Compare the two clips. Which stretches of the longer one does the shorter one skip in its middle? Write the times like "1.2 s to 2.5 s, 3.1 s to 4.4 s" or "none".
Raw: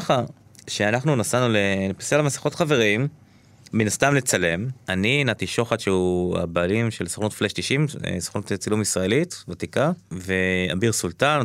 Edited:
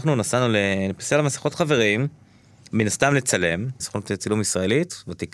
4.8 s to 8.2 s